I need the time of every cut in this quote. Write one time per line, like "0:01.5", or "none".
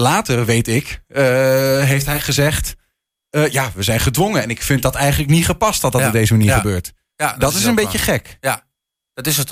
none

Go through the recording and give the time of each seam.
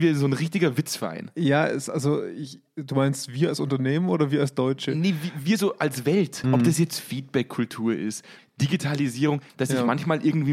0:06.4
0:08.4
0:09.5

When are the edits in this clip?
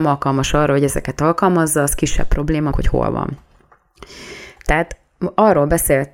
0:02.7

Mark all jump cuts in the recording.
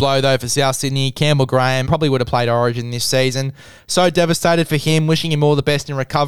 0:01.9

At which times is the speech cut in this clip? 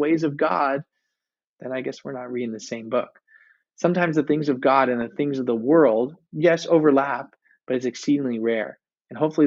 none

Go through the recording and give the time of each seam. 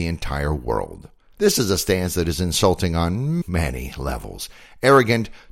0:01.3
0:03.4

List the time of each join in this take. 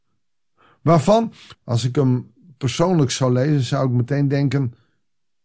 0:01.5

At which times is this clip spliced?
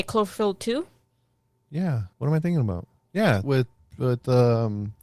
0:02.1
0:03.4

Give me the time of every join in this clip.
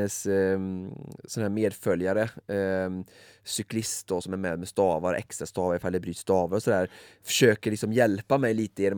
none

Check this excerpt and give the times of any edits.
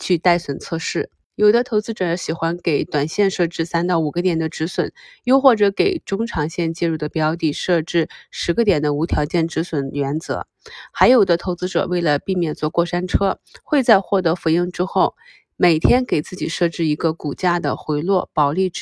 none

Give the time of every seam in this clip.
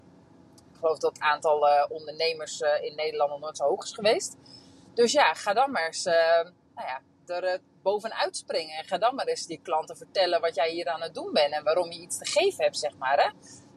none

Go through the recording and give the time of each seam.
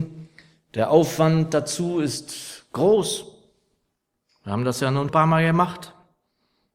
0:05.1

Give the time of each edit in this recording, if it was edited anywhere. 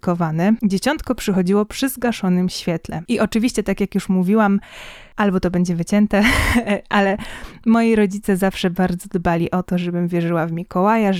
none

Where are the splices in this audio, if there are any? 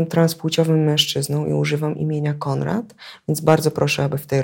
none

